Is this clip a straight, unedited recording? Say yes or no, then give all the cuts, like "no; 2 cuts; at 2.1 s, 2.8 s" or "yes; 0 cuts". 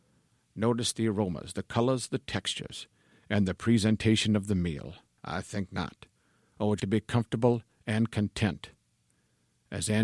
no; 2 cuts; at 5.2 s, 6.8 s